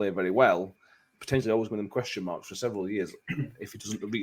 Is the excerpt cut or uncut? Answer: cut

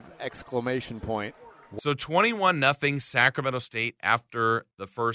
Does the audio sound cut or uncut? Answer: uncut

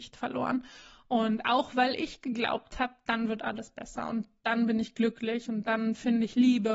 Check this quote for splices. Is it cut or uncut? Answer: uncut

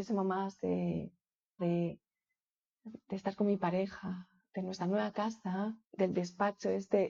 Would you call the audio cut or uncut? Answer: cut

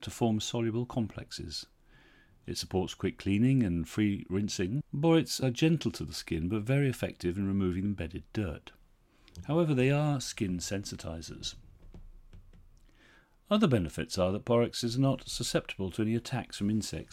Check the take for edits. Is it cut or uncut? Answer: uncut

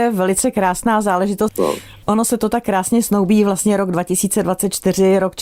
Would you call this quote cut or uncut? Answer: cut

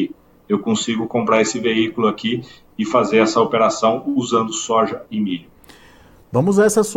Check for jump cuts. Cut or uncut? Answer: uncut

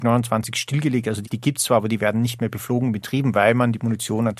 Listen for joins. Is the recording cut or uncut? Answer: cut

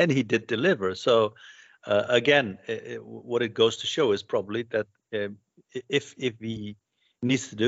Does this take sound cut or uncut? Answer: uncut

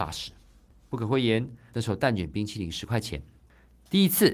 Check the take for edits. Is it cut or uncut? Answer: cut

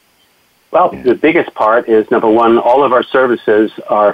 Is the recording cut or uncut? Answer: cut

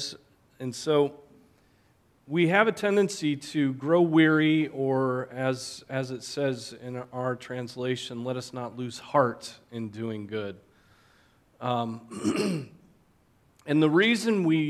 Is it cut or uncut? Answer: uncut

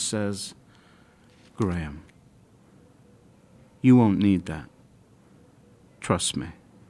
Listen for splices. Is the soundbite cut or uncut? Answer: uncut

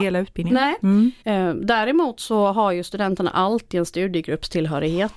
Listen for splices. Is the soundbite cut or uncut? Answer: cut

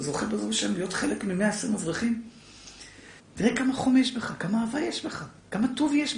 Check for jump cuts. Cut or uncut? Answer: cut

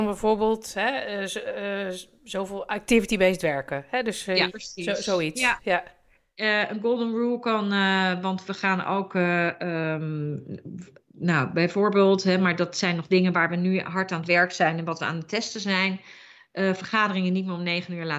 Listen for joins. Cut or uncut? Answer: cut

